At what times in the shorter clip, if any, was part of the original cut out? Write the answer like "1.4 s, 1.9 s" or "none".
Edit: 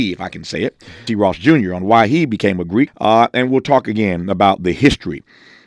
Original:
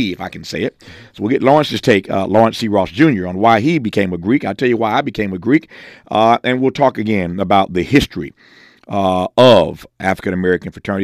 1.1 s, 2.9 s